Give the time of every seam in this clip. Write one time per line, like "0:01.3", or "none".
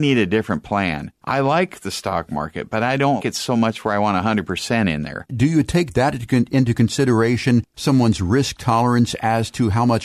0:03.2
0:05.3